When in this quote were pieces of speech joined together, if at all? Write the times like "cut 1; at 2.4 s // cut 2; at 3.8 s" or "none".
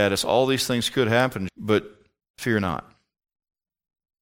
cut 1; at 1.5 s